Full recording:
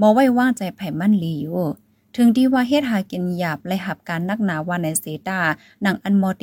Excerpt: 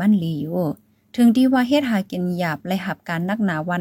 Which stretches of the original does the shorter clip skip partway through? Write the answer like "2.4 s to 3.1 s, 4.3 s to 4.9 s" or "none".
none

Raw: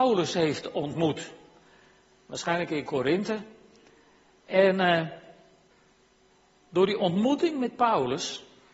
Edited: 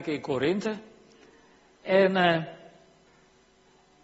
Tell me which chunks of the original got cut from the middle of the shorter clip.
none

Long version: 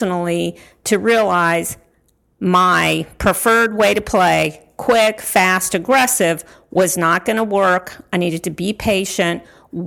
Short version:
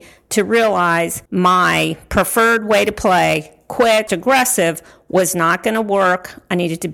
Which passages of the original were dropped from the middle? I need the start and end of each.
1.8 s to 2.3 s, 5.2 s to 5.7 s

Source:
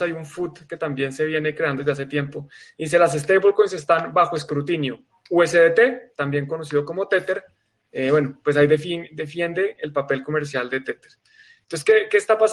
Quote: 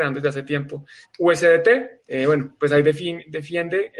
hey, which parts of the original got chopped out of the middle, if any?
2.7 s to 5.1 s, 6.1 s to 7.9 s

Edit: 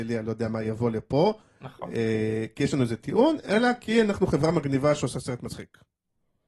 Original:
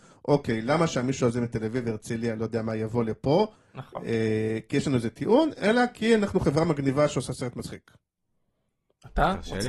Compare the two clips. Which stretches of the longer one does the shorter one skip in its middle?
none

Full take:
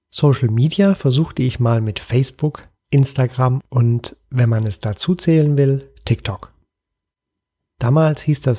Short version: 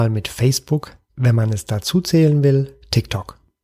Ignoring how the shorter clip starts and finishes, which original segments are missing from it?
2.8 s to 4.2 s

